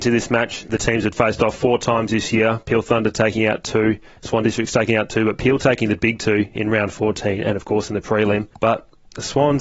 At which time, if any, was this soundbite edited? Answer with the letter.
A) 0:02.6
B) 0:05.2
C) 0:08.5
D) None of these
C